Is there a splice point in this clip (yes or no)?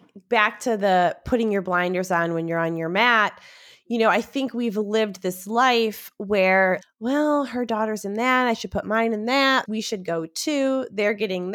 yes